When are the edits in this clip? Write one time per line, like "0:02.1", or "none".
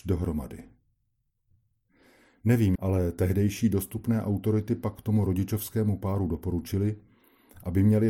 0:02.8

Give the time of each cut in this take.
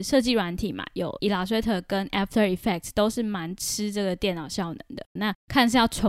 0:05.2

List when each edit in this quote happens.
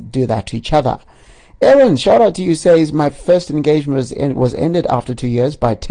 none

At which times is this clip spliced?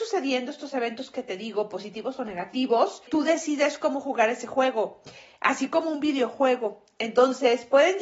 none

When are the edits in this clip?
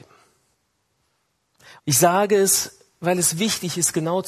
0:01.8

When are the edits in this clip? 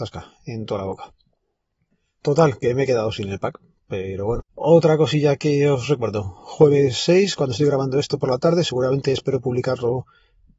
0:04.5

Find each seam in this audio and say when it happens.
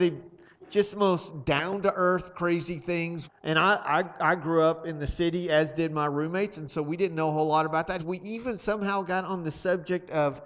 0:03.2
0:08.0

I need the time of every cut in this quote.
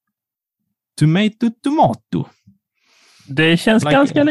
none

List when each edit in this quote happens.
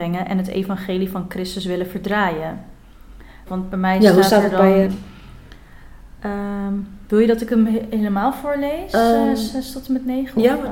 0:03.5
0:04.9

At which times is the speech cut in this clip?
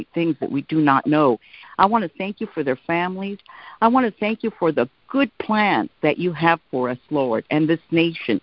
0:01.6

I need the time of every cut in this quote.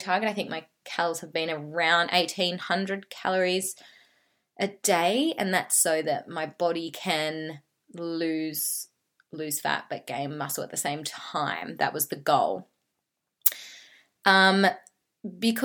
none

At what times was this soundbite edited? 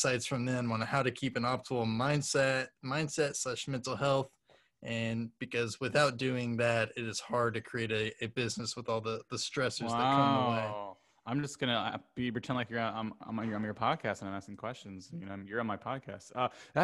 none

